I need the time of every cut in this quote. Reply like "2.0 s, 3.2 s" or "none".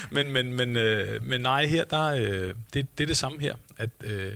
none

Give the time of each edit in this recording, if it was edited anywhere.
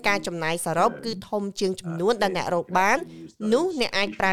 none

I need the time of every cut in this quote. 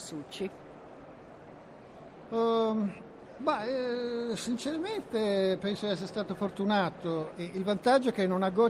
3.4 s, 7.3 s

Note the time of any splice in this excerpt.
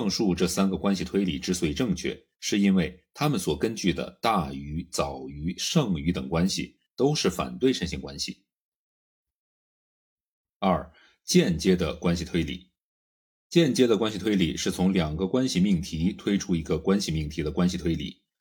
none

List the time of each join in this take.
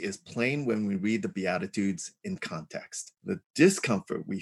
3.2 s

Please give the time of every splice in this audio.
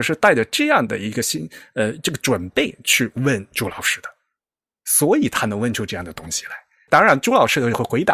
none

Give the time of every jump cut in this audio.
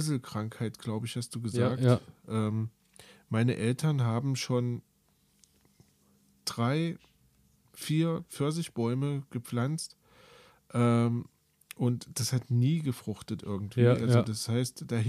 none

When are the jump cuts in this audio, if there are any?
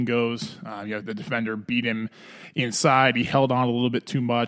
1.0 s

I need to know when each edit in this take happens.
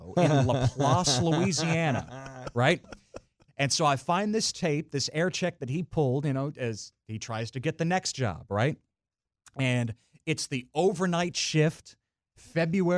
3.5 s

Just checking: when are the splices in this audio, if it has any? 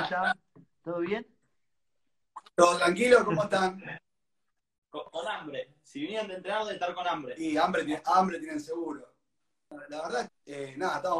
10.3 s

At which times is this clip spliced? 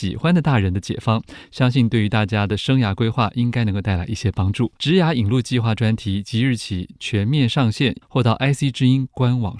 4.8 s, 8.0 s

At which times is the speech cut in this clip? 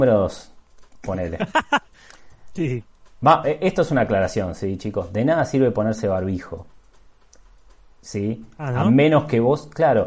none

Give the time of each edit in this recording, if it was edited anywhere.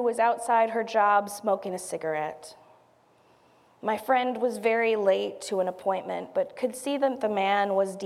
none

